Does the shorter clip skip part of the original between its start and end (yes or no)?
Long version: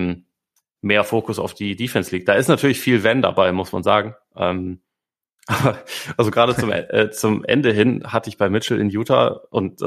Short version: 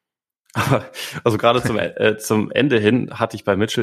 no